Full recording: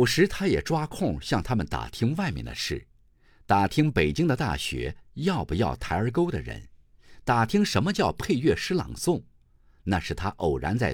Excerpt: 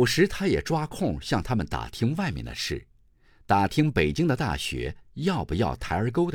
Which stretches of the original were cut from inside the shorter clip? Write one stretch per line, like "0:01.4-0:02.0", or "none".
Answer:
none